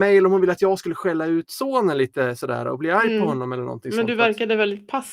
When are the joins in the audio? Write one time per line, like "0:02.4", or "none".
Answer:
none